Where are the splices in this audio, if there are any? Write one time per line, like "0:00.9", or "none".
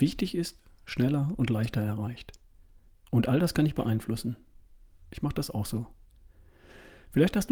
0:02.9
0:05.0